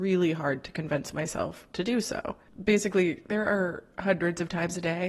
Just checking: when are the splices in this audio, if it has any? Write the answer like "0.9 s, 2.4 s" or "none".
none